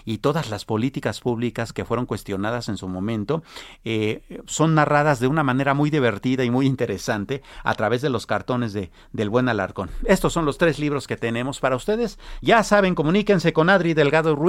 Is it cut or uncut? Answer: uncut